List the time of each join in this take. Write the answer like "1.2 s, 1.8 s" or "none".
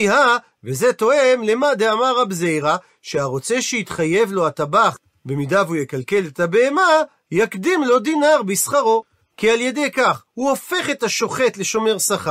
none